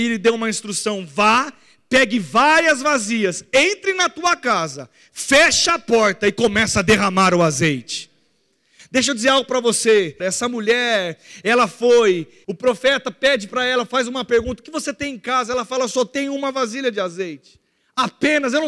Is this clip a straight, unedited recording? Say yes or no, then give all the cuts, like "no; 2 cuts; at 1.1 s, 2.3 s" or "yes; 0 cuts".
no; 2 cuts; at 10.2 s, 12.4 s